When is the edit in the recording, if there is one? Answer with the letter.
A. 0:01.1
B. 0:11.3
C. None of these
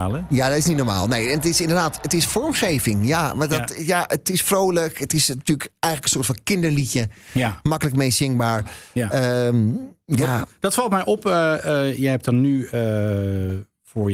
C